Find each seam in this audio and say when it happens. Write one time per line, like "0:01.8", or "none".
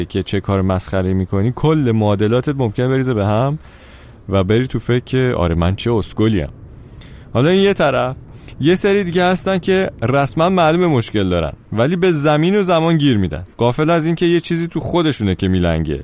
0:11.6
0:13.5